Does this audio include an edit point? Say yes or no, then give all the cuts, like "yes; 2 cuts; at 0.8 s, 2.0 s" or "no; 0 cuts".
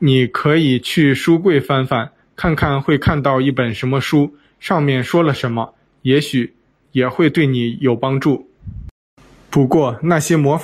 yes; 1 cut; at 9.3 s